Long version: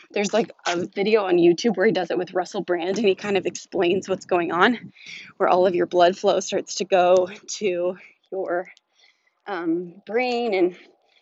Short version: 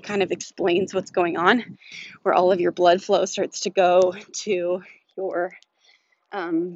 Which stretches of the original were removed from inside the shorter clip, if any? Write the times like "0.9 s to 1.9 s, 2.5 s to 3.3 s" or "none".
none